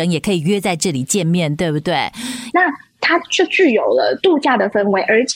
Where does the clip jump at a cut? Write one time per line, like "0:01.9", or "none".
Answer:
0:02.5